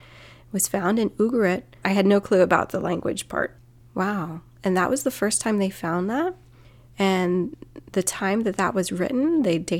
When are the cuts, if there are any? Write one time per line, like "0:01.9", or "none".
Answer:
0:01.8
0:03.8